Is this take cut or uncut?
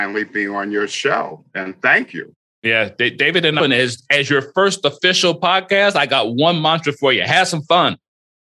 cut